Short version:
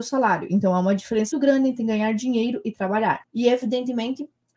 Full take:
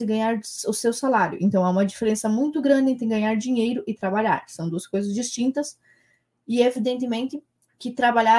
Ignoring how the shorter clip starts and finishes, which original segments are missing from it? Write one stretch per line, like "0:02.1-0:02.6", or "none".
0:02.2-0:02.5
0:04.5-0:06.4